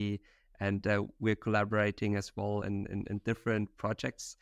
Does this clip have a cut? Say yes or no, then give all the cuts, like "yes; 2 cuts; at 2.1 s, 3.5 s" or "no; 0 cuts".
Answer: no; 0 cuts